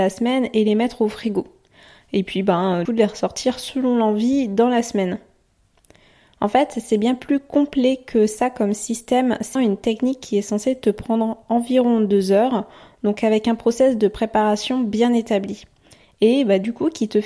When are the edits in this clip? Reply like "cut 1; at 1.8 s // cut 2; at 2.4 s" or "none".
cut 1; at 2.9 s // cut 2; at 9.6 s